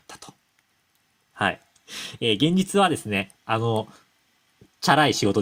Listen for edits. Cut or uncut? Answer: cut